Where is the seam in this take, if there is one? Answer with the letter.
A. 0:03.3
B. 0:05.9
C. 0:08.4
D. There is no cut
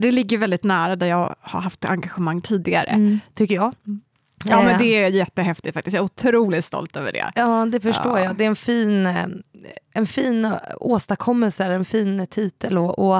A